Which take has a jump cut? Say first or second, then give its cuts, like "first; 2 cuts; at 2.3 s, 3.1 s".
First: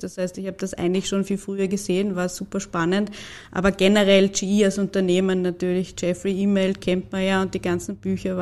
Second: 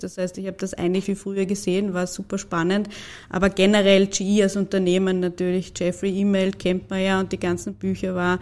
second; 1 cut; at 1.0 s